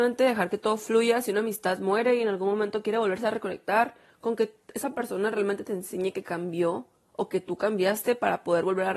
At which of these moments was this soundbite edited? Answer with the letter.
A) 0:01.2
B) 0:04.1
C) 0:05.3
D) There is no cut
B